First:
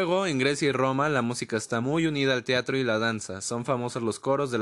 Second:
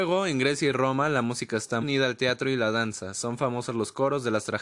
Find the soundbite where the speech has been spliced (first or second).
second